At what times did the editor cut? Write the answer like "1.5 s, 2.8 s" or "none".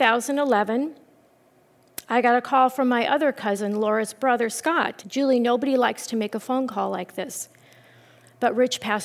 5.0 s